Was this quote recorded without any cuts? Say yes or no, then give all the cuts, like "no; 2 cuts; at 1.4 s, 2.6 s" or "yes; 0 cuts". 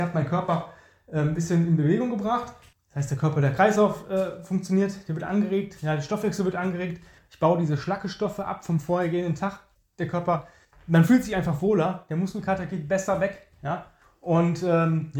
yes; 0 cuts